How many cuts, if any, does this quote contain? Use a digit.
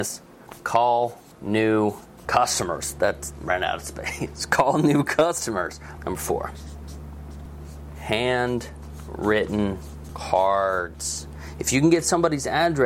1